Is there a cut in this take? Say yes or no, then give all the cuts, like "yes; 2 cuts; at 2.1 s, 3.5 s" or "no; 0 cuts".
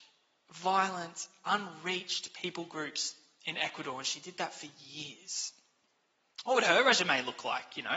no; 0 cuts